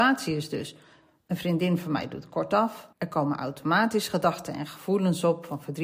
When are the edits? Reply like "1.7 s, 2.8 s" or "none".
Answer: 2.9 s